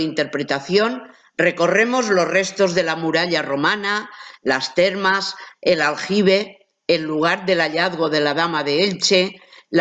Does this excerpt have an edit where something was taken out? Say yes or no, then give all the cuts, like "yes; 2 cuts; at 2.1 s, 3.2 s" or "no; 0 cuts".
yes; 1 cut; at 5.5 s